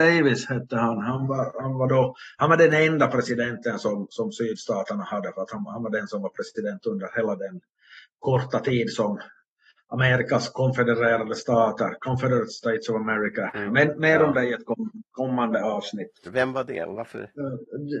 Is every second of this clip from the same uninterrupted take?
no; 2 cuts; at 13.7 s, 16.3 s

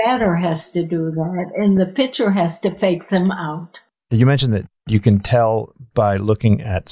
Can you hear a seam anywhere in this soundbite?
yes; 2 cuts; at 1.8 s, 5.9 s

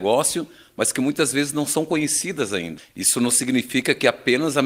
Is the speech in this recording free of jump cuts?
no; 1 cut; at 2.9 s

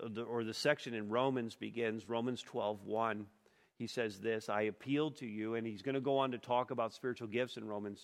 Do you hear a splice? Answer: no; 0 cuts

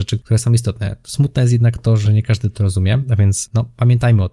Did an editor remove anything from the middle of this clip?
no; 0 cuts

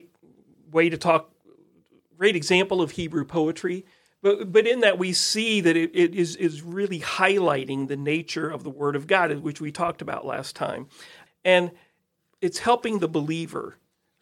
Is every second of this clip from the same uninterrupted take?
yes; 0 cuts

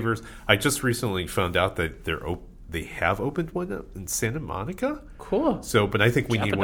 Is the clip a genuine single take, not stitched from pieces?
yes; 0 cuts

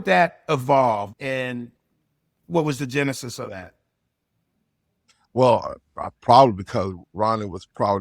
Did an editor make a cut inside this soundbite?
yes; 1 cut; at 1.1 s

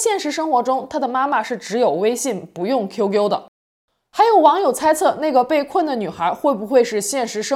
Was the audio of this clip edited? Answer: no; 0 cuts

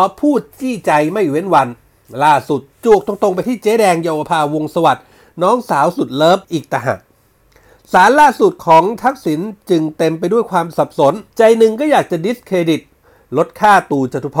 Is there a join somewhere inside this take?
yes; 2 cuts; at 6.4 s, 11.3 s

